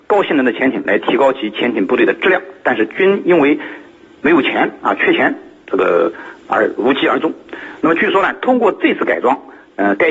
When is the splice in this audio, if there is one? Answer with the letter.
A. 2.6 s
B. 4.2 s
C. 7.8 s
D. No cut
C